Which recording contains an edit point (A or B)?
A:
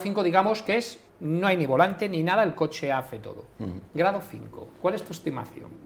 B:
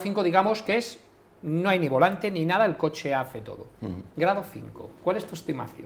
A